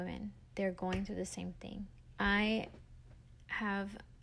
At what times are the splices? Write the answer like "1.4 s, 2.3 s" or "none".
2.2 s